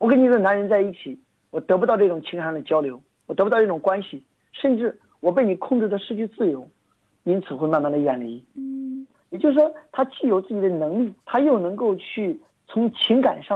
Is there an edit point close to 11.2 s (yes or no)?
yes